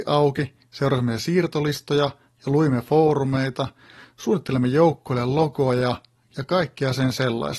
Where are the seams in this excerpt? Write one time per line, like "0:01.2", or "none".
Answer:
0:04.0